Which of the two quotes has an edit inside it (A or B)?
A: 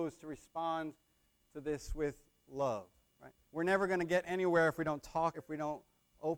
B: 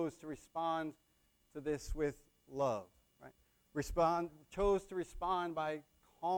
A